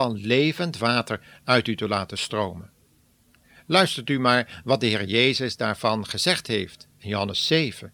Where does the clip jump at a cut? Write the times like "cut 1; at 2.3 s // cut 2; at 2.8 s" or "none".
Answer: cut 1; at 6.9 s